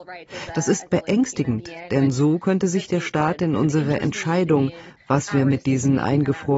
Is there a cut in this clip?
no; 0 cuts

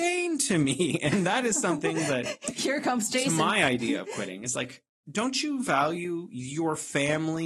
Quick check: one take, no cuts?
yes; 0 cuts

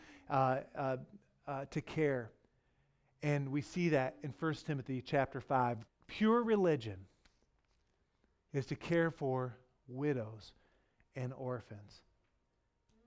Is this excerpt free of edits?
no; 1 cut; at 5.9 s

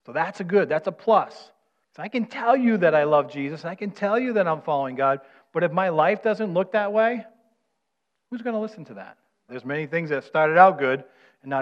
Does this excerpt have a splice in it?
yes; 2 cuts; at 1.8 s, 9.5 s

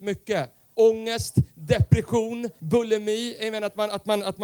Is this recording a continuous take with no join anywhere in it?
no; 1 cut; at 2.6 s

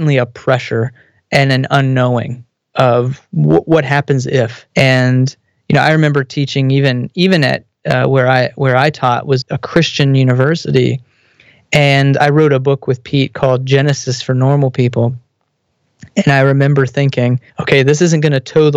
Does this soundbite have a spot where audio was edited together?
yes; 3 cuts; at 4.7 s, 9.4 s, 17.5 s

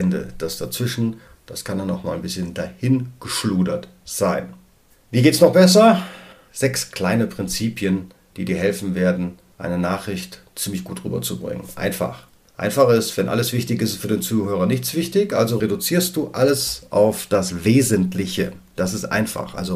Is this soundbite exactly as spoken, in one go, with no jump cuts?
yes; 0 cuts

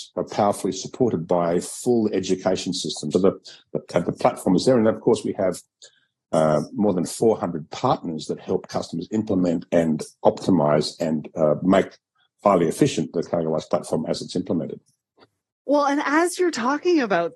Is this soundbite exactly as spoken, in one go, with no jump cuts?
no; 1 cut; at 3.1 s

